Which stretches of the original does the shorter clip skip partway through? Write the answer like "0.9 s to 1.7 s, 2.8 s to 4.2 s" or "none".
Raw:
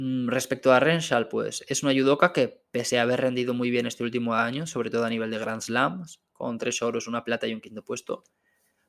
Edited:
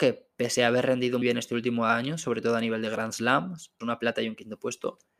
3.6 s to 3.7 s, 6.3 s to 7.1 s